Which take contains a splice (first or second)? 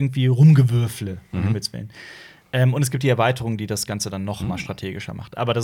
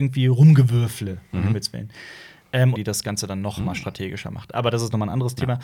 second